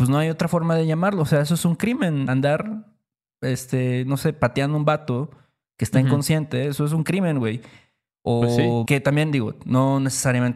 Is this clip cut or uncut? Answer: cut